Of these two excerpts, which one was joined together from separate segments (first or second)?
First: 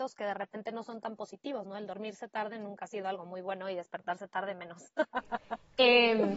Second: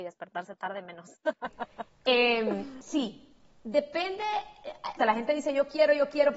second